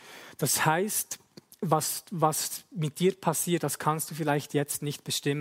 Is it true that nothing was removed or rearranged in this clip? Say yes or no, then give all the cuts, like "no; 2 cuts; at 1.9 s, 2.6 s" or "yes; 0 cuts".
yes; 0 cuts